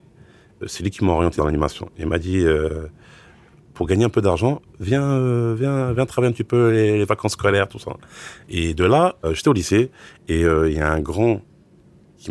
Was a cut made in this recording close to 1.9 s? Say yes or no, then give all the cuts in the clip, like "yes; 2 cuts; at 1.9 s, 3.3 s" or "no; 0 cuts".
no; 1 cut; at 8.4 s